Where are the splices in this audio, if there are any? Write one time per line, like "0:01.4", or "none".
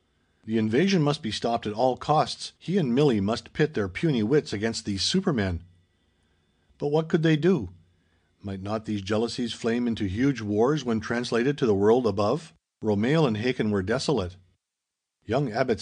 0:02.6
0:08.2
0:12.8